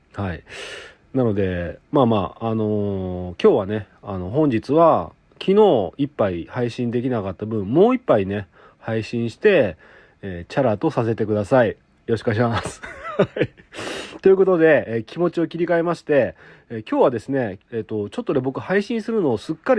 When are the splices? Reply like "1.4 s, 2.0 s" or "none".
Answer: 17.6 s